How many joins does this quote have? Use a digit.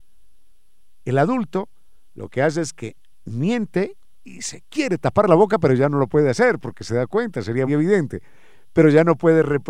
1